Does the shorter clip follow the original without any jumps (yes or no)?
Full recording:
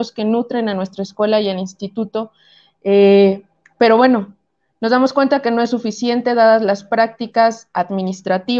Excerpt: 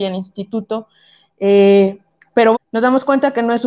no